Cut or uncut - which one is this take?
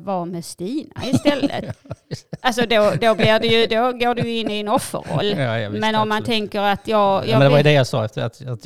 uncut